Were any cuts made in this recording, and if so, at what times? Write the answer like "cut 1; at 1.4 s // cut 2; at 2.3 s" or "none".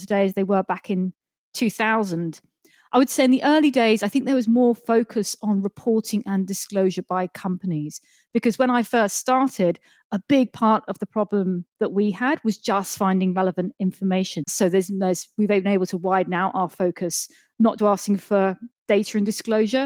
cut 1; at 14.4 s // cut 2; at 17.8 s